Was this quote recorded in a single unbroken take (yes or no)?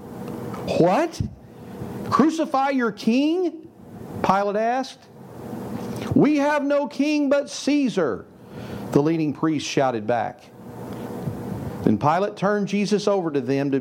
yes